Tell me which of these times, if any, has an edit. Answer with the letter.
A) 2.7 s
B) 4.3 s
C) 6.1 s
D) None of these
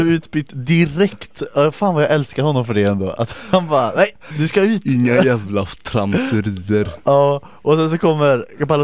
B